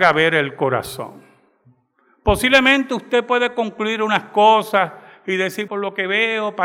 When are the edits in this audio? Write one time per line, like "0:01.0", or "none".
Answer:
0:05.7